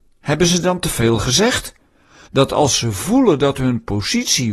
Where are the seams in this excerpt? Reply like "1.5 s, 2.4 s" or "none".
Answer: 2.3 s